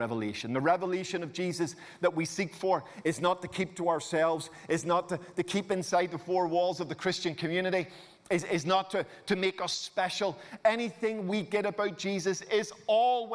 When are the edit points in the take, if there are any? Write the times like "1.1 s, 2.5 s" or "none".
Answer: none